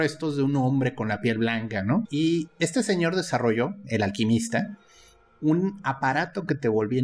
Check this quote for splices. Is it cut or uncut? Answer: cut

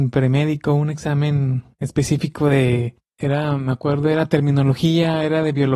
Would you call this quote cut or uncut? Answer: uncut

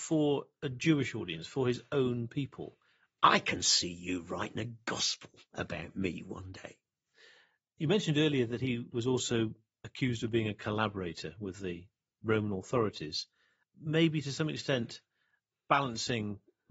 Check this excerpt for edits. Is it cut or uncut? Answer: cut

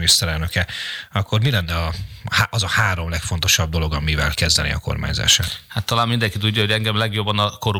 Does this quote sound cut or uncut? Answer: uncut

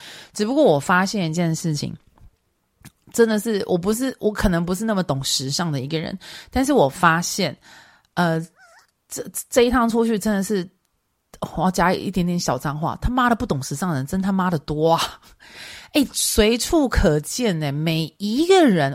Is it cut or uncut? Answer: uncut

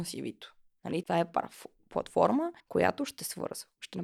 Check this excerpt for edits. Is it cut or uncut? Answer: cut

